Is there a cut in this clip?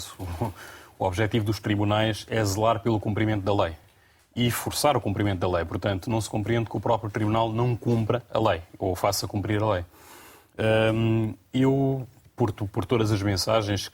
no; 0 cuts

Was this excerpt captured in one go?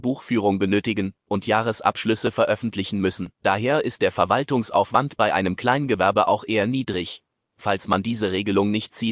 no; 1 cut; at 3.3 s

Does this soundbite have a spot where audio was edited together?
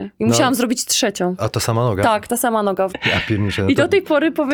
yes; 2 cuts; at 1.4 s, 2.9 s

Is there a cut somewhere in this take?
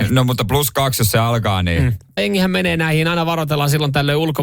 yes; 1 cut; at 2.2 s

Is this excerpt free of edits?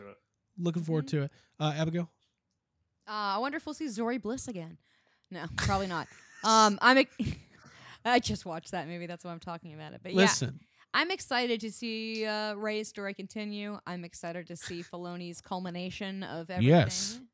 yes; 0 cuts

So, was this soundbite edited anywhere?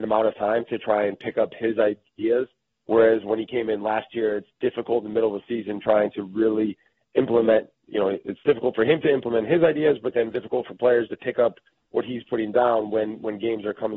no; 0 cuts

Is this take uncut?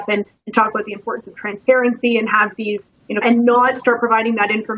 no; 1 cut; at 3.2 s

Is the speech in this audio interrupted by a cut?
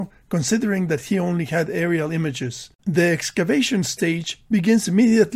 yes; 1 cut; at 2.8 s

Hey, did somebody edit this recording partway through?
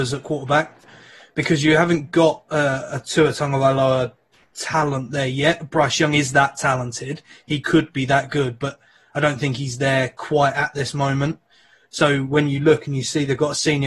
no; 0 cuts

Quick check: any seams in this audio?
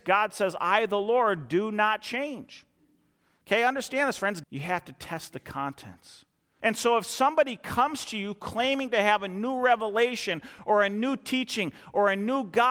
yes; 2 cuts; at 4.4 s, 6.6 s

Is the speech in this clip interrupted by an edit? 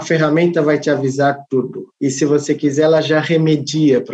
no; 0 cuts

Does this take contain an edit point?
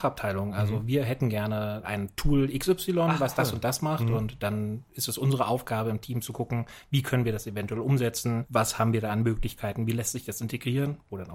no; 0 cuts

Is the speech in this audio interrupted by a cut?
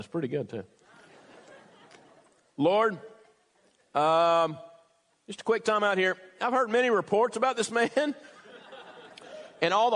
no; 0 cuts

